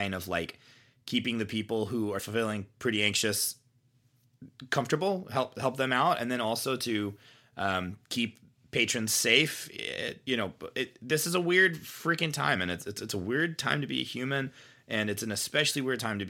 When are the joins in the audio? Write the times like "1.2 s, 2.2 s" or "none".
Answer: 2.2 s

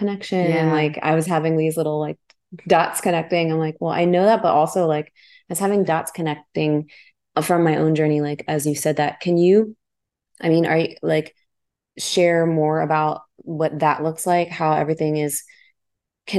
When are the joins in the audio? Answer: none

